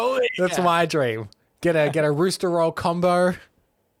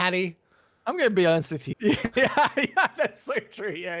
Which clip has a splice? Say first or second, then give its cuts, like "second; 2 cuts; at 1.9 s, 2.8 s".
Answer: second; 1 cut; at 1.7 s